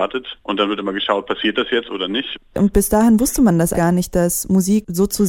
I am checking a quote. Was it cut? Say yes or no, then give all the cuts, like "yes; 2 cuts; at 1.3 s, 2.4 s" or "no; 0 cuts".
yes; 2 cuts; at 2.4 s, 3.7 s